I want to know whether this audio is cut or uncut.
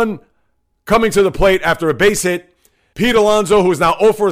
cut